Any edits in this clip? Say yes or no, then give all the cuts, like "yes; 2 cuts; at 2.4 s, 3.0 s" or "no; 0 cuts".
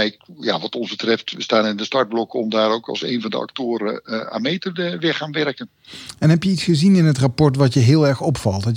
no; 0 cuts